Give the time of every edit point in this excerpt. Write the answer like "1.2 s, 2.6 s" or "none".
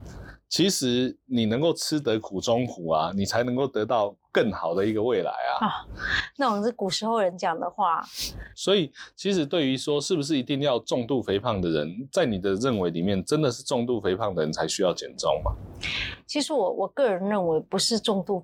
none